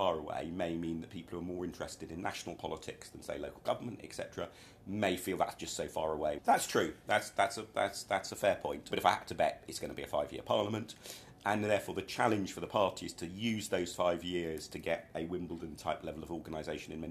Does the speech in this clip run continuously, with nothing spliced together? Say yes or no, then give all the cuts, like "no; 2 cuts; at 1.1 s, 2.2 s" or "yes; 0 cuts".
no; 2 cuts; at 6.4 s, 8.9 s